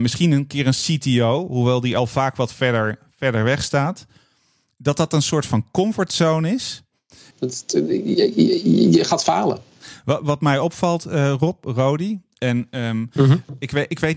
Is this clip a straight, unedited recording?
no; 1 cut; at 7.3 s

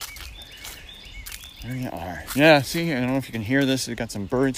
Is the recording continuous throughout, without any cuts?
yes; 0 cuts

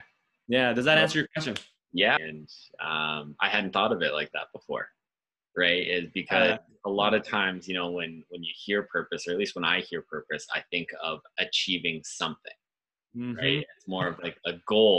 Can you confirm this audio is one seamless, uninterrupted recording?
no; 1 cut; at 2.2 s

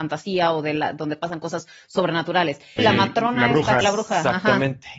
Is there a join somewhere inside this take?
yes; 2 cuts; at 2.8 s, 3.8 s

